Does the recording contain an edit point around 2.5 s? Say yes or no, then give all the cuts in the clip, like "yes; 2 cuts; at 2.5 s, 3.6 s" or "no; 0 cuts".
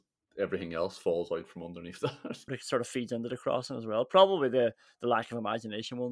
yes; 1 cut; at 2.5 s